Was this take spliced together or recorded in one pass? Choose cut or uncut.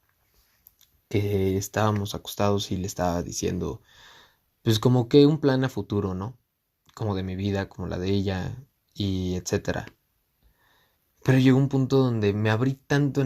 uncut